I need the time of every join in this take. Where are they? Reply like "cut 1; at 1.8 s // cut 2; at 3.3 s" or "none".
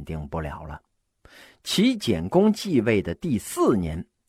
none